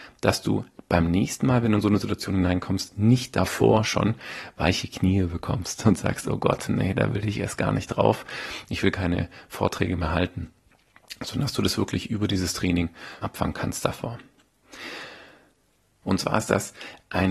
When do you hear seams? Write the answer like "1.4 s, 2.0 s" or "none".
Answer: 13.2 s, 16.0 s